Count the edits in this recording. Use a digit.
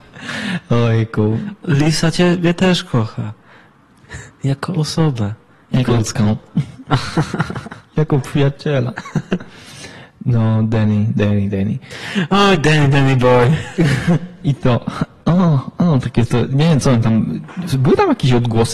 1